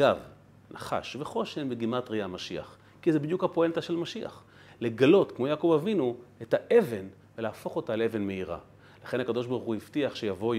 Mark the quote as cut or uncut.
uncut